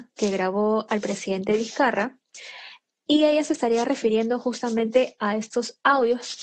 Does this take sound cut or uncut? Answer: uncut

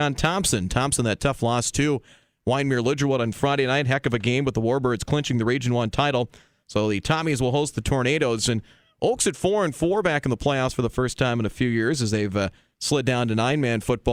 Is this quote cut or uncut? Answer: uncut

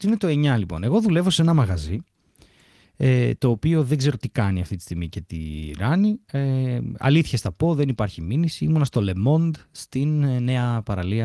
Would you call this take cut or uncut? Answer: uncut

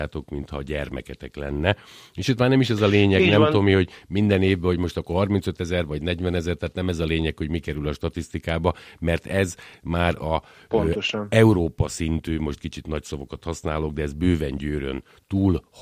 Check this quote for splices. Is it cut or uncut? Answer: uncut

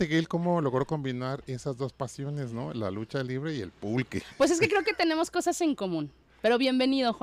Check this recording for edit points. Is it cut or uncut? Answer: uncut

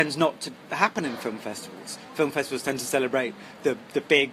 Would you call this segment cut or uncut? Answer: uncut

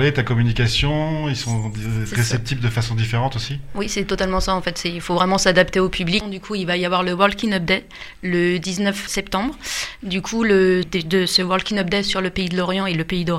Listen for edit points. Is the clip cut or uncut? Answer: cut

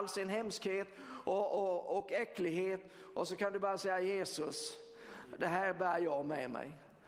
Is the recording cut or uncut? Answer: uncut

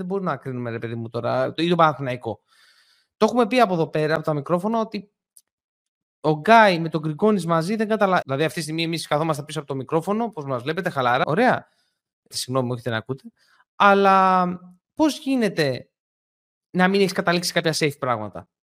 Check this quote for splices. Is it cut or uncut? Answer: cut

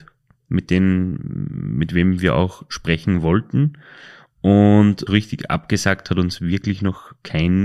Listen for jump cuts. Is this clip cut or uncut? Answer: cut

